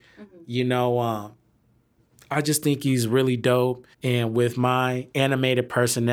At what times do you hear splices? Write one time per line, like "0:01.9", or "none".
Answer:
0:03.9